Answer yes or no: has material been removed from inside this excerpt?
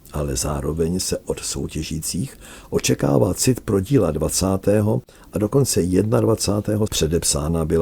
yes